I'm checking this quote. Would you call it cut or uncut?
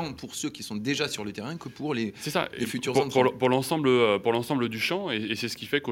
uncut